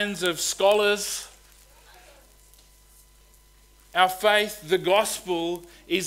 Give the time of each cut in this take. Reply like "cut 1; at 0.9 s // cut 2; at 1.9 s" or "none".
none